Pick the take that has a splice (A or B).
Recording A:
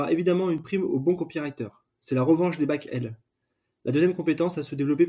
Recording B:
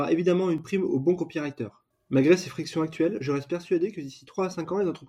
B